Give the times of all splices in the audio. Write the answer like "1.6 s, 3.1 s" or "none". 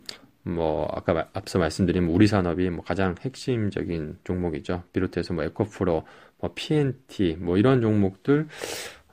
none